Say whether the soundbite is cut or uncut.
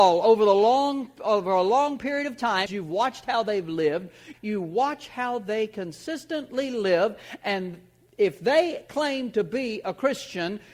cut